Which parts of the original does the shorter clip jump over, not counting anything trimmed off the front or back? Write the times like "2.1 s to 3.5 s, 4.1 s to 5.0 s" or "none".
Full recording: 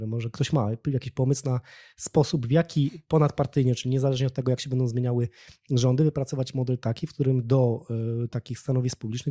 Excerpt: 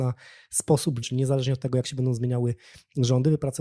2.5 s to 3.8 s